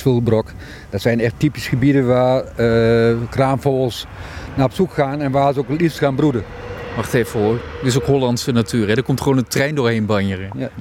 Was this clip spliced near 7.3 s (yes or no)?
no